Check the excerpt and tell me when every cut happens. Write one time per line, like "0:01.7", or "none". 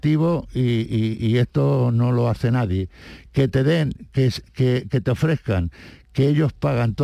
none